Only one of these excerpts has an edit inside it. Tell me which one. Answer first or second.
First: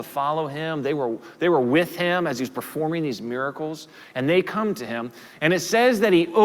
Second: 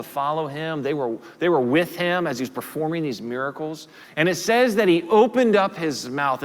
second